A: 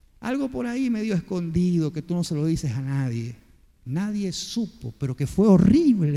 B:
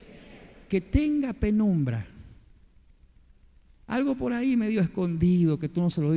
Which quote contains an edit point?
A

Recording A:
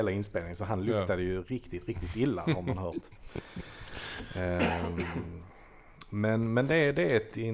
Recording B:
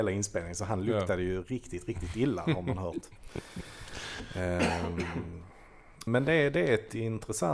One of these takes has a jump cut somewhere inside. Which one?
B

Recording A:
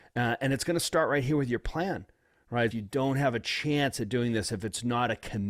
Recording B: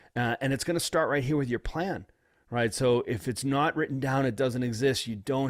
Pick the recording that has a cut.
A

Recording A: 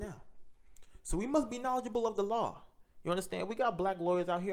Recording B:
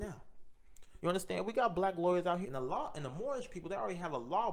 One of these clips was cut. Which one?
B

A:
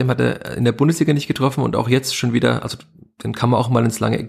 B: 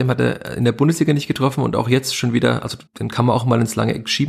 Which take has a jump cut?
B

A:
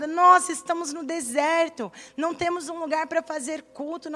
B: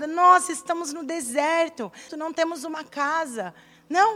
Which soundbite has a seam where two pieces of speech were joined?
B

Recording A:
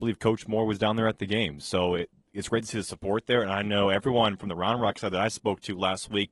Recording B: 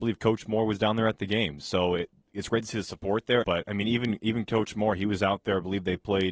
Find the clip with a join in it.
B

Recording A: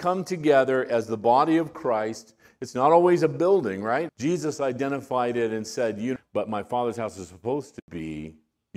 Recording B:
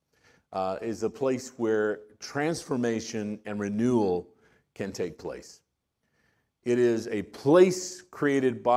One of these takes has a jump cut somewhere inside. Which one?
A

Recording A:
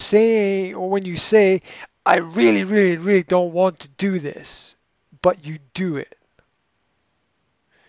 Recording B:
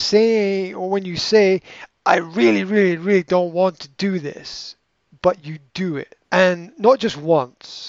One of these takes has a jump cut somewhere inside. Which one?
B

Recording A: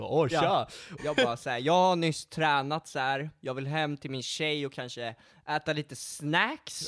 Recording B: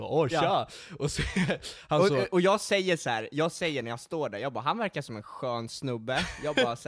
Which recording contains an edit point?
A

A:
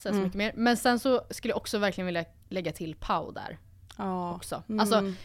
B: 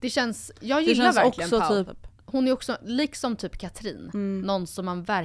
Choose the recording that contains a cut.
B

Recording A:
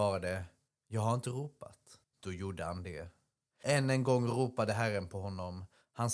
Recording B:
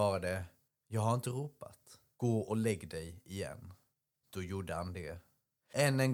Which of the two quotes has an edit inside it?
A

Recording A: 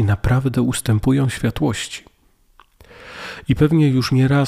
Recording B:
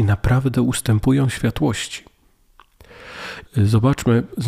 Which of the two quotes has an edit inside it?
B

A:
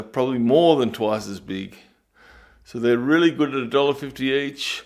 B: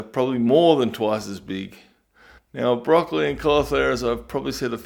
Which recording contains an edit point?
B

